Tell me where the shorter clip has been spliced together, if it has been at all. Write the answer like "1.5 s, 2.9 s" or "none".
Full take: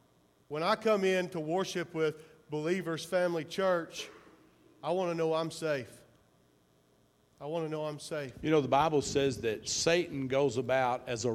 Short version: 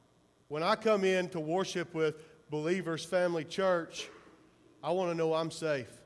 none